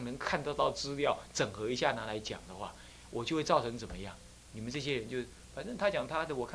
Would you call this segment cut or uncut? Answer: uncut